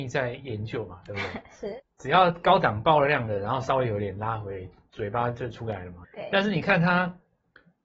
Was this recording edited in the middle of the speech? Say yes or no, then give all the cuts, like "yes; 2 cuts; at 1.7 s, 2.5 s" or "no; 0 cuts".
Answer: yes; 2 cuts; at 1.8 s, 6.0 s